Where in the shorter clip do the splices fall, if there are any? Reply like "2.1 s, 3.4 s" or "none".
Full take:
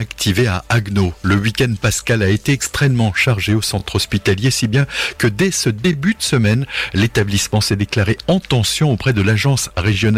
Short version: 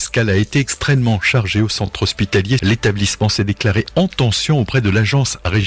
2.6 s